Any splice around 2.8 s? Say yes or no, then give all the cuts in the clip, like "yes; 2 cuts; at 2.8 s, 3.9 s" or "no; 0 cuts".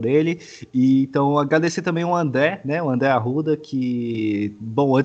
no; 0 cuts